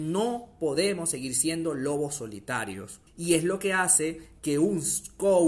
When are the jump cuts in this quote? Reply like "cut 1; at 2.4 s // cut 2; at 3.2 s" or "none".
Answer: cut 1; at 3.1 s